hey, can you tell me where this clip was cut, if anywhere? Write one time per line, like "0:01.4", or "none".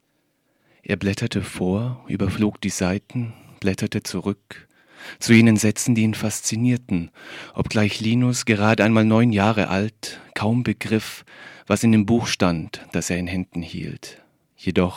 none